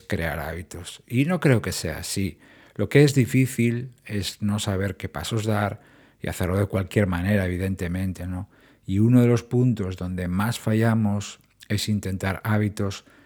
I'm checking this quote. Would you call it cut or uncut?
uncut